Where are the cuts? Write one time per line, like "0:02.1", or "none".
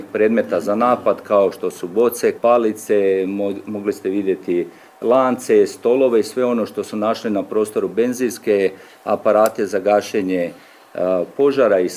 0:02.4

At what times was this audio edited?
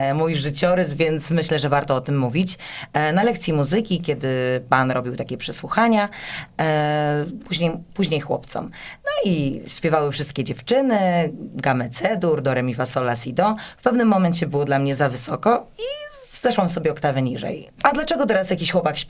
0:07.4
0:17.7

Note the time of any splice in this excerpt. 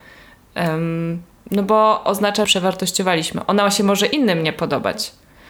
0:02.4

